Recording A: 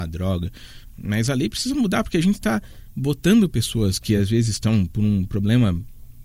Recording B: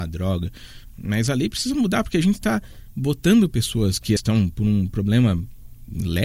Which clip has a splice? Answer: B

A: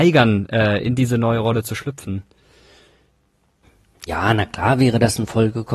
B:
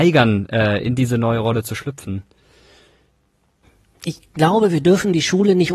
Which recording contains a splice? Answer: A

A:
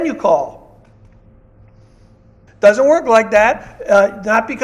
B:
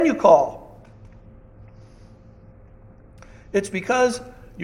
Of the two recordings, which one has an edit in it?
A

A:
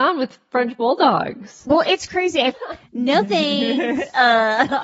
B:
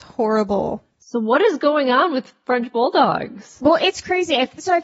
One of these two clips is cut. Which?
A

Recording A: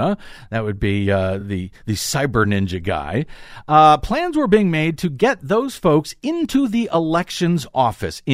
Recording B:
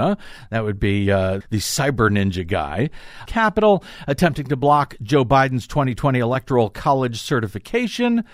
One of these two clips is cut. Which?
B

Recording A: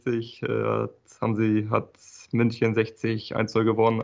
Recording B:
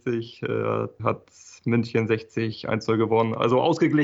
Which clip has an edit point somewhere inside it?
B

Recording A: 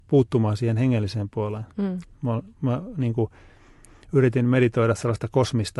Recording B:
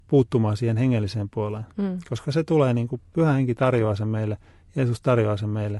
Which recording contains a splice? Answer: A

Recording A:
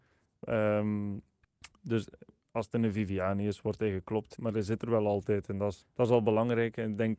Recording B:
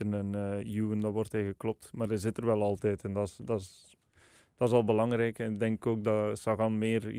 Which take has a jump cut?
A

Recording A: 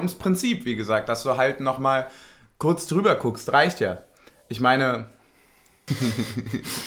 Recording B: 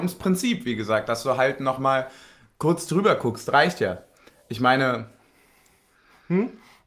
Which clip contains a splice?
A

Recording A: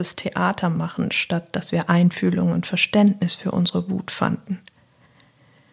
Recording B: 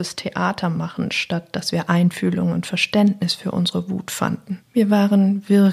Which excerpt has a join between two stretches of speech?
B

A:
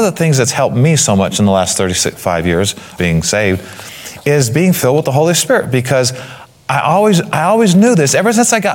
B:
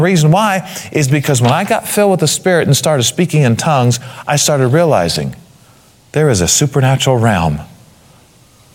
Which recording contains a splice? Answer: A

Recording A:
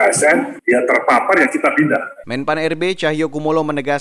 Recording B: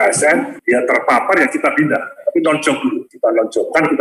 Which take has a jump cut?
A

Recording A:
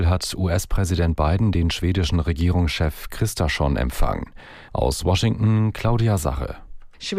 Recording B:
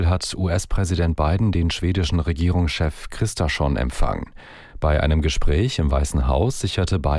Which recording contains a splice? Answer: A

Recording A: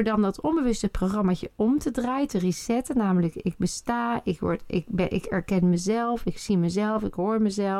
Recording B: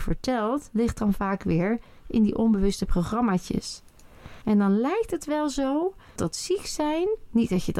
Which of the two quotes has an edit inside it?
B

